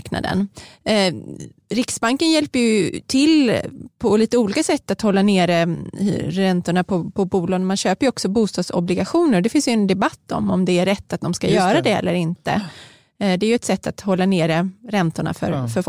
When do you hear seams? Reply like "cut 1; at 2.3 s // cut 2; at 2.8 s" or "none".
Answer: none